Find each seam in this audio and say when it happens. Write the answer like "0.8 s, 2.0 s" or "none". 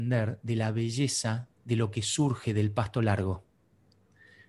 1.5 s